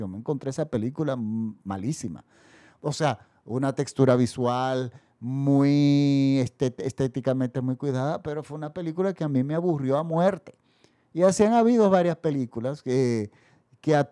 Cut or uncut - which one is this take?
uncut